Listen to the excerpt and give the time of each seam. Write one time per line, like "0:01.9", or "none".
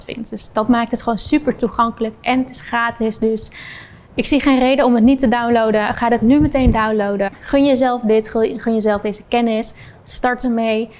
none